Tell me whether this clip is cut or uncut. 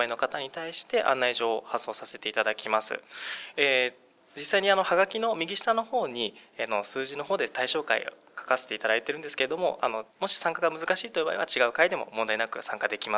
cut